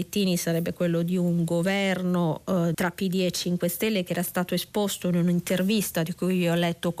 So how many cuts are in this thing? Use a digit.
1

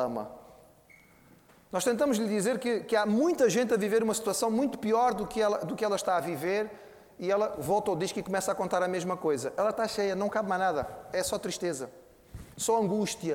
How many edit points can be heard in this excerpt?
0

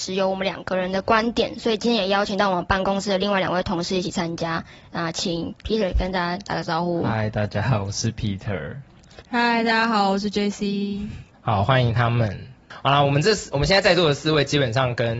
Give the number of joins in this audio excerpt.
2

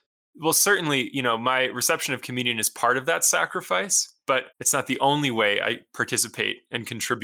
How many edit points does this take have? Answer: 1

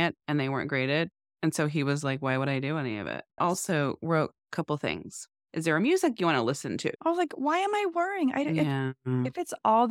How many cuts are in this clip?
3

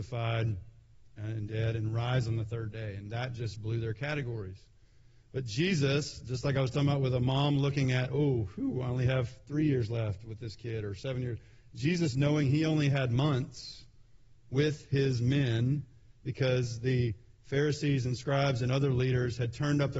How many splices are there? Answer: 0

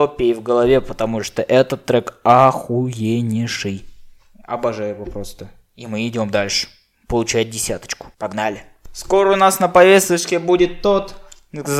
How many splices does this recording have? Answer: 1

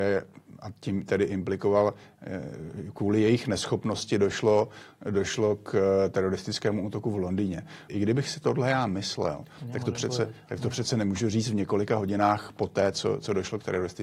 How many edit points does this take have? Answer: 1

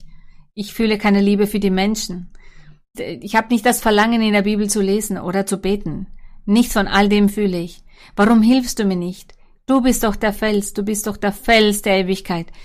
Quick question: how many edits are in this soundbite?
1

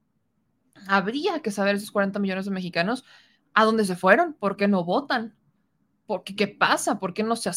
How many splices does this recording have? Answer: 1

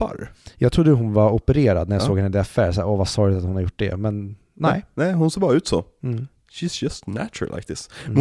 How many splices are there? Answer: 0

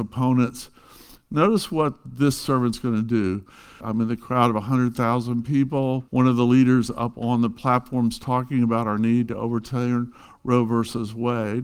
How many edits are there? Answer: 2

